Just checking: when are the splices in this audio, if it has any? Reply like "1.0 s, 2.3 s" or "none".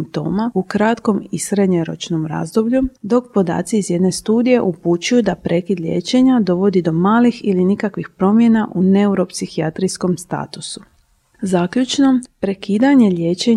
none